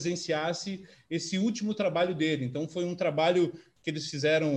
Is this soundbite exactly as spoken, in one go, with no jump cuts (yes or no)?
yes